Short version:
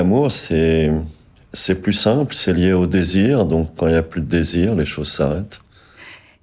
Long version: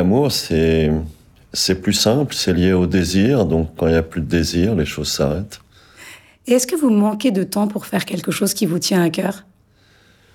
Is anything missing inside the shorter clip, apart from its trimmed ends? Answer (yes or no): no